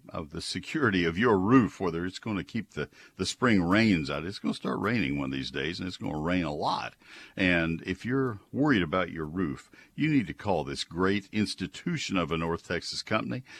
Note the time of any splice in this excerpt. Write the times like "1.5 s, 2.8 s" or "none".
none